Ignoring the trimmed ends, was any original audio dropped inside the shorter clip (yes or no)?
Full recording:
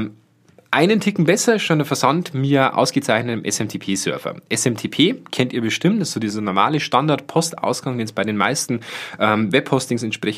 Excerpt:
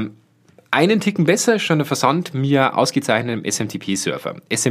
no